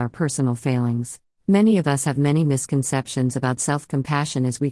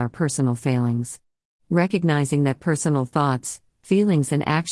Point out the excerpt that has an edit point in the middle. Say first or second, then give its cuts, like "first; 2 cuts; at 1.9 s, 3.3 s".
first; 1 cut; at 1.3 s